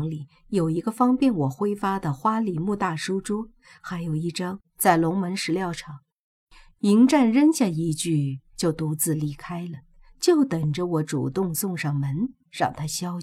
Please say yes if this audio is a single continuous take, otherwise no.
no